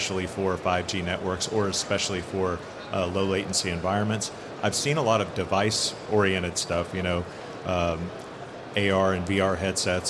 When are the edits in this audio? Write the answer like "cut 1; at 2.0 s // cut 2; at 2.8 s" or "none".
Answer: cut 1; at 4.6 s